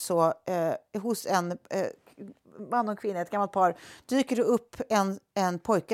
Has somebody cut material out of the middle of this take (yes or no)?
no